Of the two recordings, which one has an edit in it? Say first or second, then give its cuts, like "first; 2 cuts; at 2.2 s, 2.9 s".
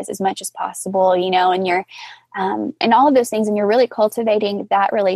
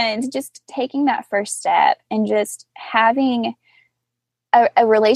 first; 1 cut; at 2.8 s